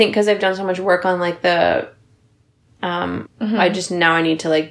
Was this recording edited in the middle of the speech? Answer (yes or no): yes